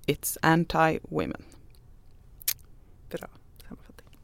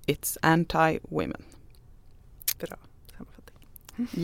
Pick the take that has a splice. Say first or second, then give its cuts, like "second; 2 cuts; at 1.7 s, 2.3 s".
second; 1 cut; at 2.6 s